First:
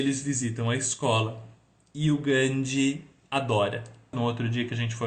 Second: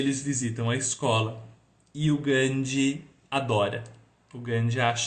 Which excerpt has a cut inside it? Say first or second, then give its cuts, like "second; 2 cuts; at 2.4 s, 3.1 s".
first; 1 cut; at 4.1 s